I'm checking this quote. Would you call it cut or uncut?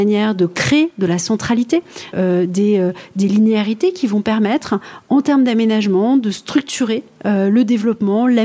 cut